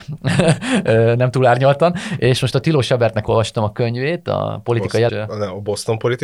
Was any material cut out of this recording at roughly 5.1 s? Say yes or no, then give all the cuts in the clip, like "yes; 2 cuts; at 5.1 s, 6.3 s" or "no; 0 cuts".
yes; 1 cut; at 5.1 s